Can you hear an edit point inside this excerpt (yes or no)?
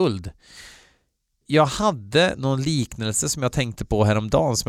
yes